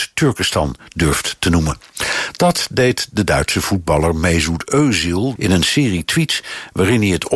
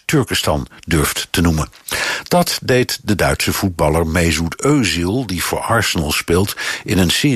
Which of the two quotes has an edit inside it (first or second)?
first